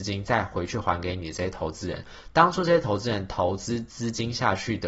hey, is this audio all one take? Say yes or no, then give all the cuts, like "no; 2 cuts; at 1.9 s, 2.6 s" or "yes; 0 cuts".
yes; 0 cuts